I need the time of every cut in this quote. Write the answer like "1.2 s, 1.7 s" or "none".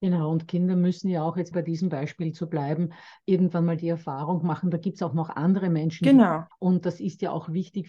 1.5 s, 6.5 s